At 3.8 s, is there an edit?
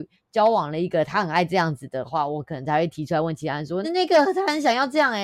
yes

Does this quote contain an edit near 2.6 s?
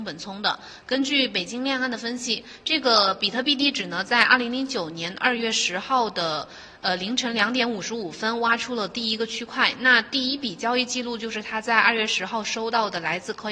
no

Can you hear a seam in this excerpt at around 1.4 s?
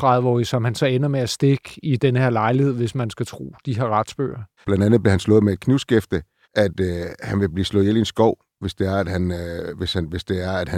no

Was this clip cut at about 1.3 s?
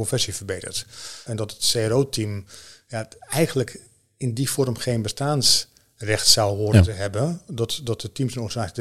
yes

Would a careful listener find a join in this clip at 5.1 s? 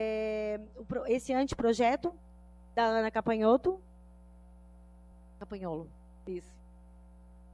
no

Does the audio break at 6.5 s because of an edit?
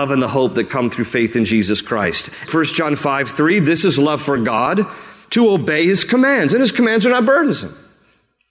no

